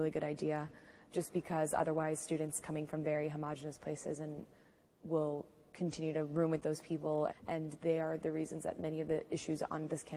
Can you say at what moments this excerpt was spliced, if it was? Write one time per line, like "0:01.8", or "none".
0:07.3